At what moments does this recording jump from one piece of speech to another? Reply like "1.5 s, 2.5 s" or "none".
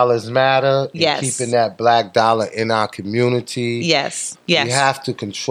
4.3 s